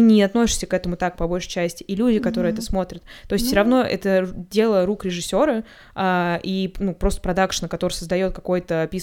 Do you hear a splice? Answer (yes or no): no